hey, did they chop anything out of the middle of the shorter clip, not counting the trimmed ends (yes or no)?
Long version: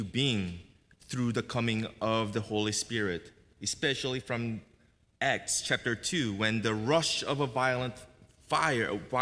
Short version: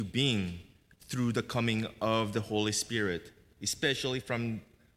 no